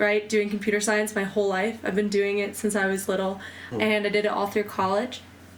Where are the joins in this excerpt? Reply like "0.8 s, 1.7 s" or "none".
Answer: 3.7 s

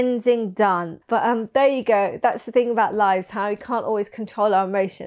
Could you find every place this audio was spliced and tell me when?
1.0 s

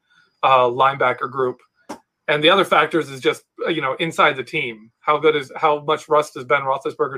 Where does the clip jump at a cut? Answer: none

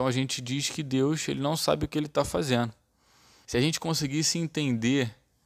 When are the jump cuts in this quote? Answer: 3.4 s

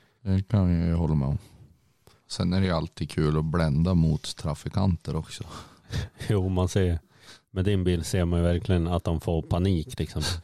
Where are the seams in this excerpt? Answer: none

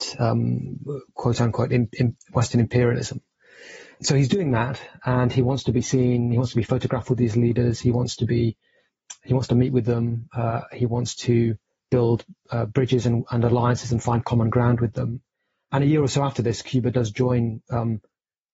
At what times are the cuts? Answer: none

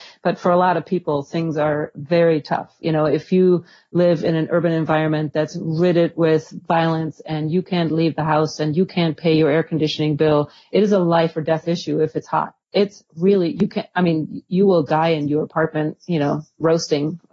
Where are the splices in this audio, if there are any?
12.6 s

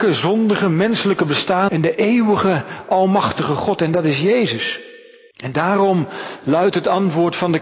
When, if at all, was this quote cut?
1.7 s, 5.3 s

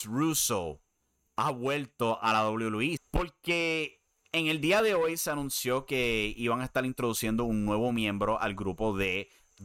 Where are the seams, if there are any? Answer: 3.0 s

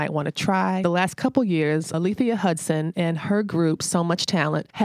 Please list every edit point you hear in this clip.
none

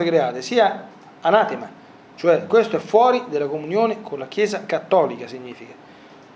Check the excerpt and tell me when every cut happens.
none

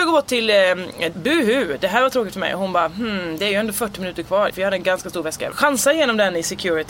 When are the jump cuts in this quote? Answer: 1.1 s, 4.5 s, 5.5 s

